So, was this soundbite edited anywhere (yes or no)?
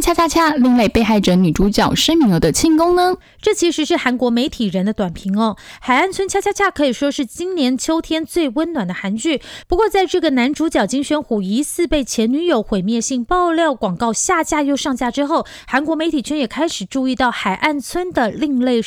no